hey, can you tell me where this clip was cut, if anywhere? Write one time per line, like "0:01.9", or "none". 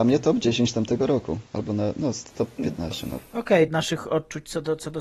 0:01.5
0:03.7